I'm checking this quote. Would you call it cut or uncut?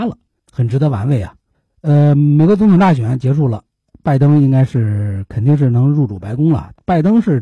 uncut